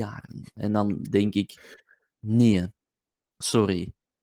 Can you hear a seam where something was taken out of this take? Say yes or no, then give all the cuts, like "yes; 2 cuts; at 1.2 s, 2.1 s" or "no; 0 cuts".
no; 0 cuts